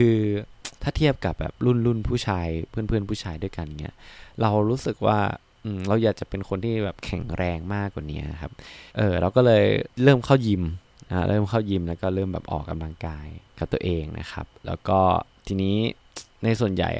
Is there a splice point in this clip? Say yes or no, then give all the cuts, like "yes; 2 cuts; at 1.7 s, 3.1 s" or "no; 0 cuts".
yes; 2 cuts; at 8.9 s, 13.5 s